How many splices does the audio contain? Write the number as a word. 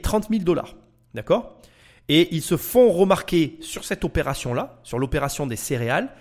zero